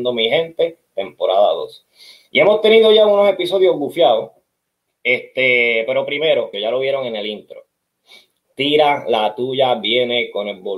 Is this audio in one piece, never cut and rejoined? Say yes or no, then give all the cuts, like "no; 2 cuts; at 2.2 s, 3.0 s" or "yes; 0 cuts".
no; 2 cuts; at 4.9 s, 6.5 s